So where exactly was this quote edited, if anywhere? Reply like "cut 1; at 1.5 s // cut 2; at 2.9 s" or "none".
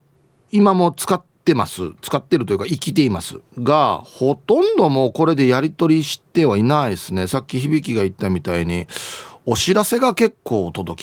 none